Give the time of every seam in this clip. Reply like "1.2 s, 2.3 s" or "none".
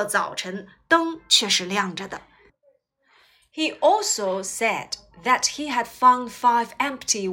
none